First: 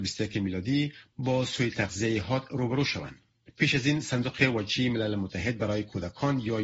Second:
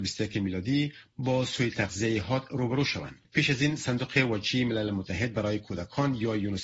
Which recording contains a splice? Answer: second; 1 cut; at 3.2 s

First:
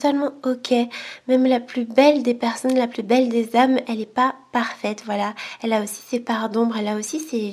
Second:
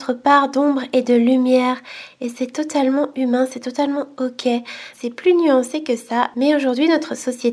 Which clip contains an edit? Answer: second; 1 cut; at 4.9 s

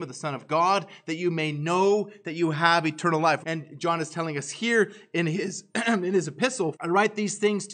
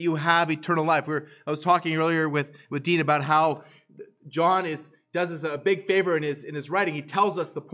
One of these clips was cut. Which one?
first; 2 cuts; at 3.4 s, 6.7 s

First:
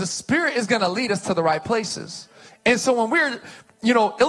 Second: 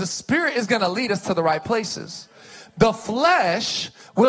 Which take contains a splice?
first; 1 cut; at 2.5 s

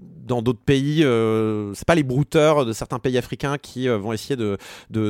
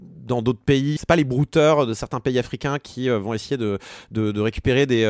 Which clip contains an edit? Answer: second; 1 cut; at 1.0 s

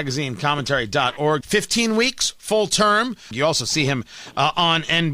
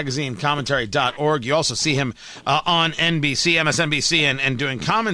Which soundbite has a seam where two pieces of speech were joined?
first; 2 cuts; at 1.4 s, 3.3 s

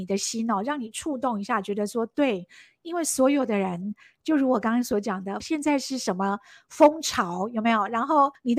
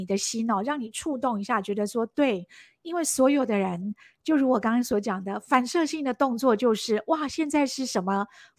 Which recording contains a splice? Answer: first; 1 cut; at 5.4 s

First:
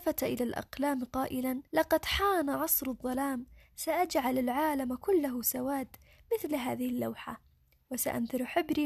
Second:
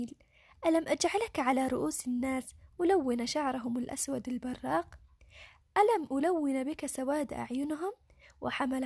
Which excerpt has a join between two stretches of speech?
first; 1 cut; at 1.7 s

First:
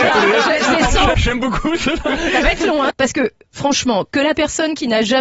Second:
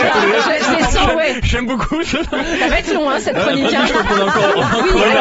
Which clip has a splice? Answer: first; 2 cuts; at 1.1 s, 2.9 s

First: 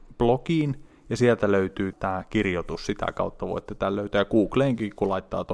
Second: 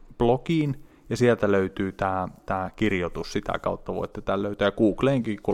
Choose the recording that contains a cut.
first; 1 cut; at 1.9 s

